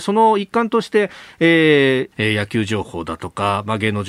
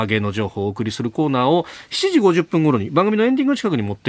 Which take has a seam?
first; 1 cut; at 2.1 s

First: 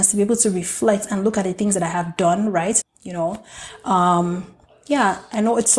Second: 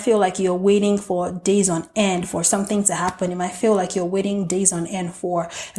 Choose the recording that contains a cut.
first; 1 cut; at 2.8 s

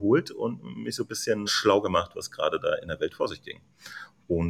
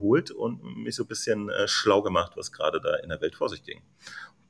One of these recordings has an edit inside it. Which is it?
first; 1 cut; at 1.5 s

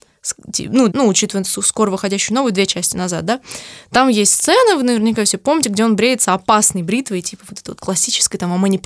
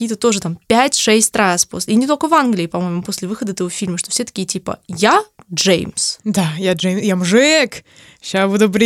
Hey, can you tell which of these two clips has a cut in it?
first; 1 cut; at 0.9 s

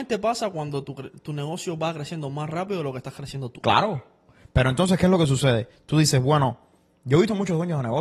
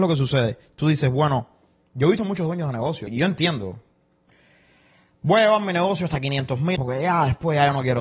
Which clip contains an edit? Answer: second; 2 cuts; at 3.1 s, 6.8 s

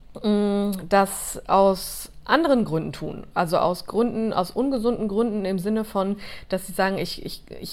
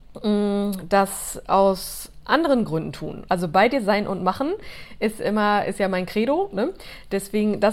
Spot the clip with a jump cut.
second; 1 cut; at 3.3 s

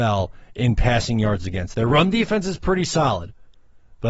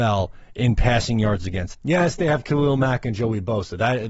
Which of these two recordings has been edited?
second; 1 cut; at 1.7 s

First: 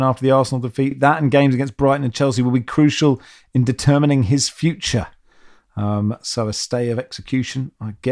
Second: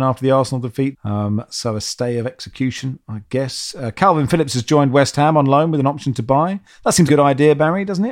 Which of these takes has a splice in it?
second; 2 cuts; at 0.9 s, 7.1 s

